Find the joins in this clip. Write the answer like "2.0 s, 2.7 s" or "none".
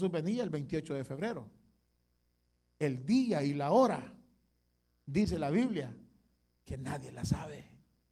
none